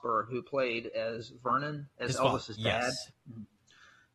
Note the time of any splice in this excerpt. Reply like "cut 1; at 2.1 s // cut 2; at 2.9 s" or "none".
cut 1; at 1.9 s // cut 2; at 3.1 s